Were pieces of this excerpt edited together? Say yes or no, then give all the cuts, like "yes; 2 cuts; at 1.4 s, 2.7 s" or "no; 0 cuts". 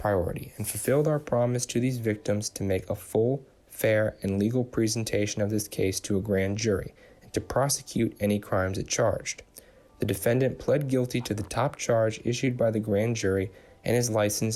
no; 0 cuts